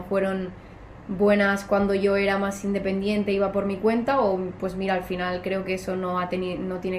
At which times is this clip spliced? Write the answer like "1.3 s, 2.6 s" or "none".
none